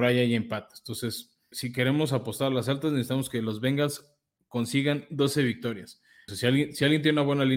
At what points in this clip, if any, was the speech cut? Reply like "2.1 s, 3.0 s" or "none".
1.5 s, 6.3 s